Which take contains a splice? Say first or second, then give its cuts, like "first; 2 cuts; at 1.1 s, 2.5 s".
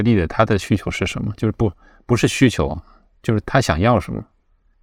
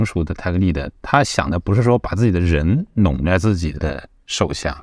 first; 1 cut; at 3.4 s